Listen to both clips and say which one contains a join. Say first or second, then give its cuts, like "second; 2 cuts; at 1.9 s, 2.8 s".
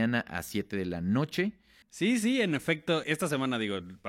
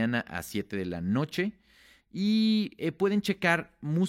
first; 2 cuts; at 1.8 s, 3.0 s